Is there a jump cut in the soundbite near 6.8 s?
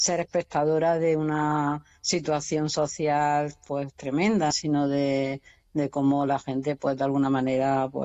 no; 1 cut; at 4.5 s

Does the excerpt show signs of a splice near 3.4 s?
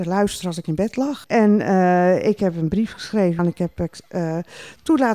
yes; 2 cuts; at 1.2 s, 3.4 s

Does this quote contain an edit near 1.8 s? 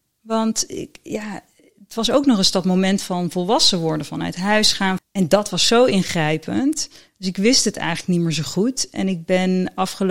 no; 1 cut; at 5.0 s

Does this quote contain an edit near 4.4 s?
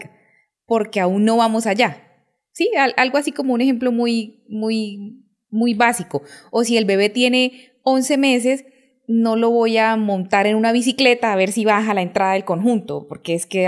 no; 0 cuts

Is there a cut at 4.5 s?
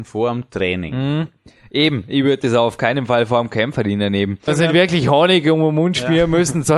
yes; 1 cut; at 4.5 s

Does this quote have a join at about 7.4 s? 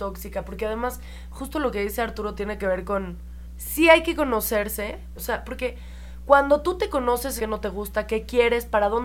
yes; 2 cuts; at 5.1 s, 7.4 s

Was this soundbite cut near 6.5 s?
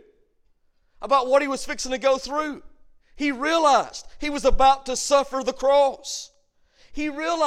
no; 1 cut; at 3.0 s

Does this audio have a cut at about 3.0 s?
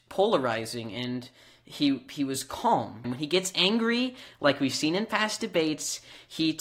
yes; 1 cut; at 3.0 s

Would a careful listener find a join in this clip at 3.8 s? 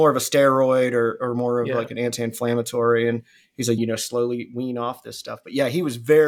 yes; 1 cut; at 3.8 s

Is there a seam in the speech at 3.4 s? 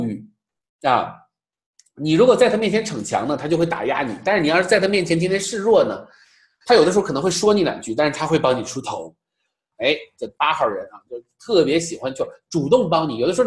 no; 1 cut; at 9.7 s

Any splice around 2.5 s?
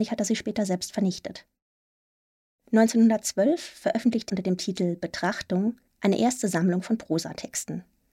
no; 2 cuts; at 4.3 s, 5.9 s

